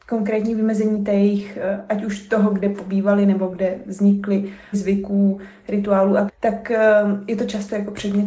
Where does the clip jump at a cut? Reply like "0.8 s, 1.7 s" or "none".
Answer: 4.7 s, 6.3 s